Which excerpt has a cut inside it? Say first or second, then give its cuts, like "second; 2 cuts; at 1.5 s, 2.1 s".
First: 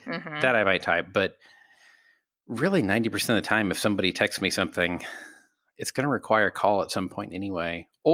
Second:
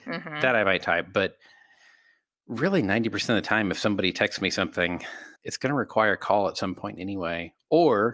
second; 1 cut; at 5.4 s